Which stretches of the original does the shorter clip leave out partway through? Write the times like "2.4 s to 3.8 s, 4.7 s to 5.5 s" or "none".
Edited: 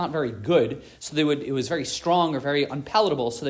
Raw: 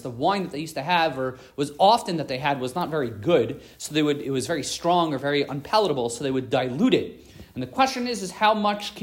none